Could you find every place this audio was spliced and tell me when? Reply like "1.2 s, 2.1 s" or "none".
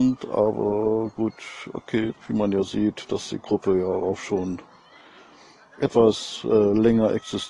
2.1 s